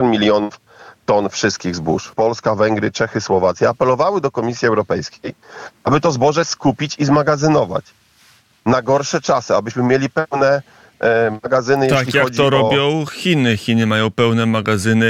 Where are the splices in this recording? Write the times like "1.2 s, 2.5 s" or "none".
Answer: 2.1 s

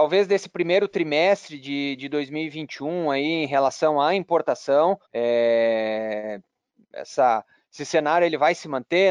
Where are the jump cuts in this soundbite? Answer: 5.0 s

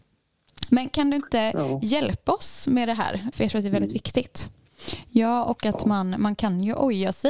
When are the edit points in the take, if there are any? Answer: 3.3 s

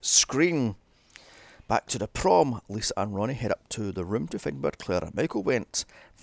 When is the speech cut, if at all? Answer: none

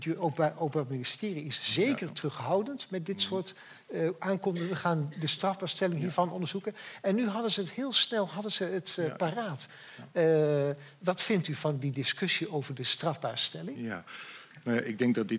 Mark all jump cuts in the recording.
none

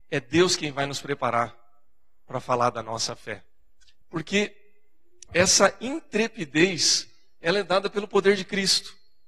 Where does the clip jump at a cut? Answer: 4.0 s, 5.3 s

